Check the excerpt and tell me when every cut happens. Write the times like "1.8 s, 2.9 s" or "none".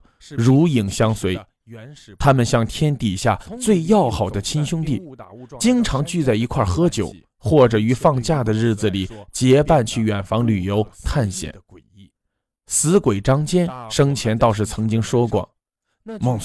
none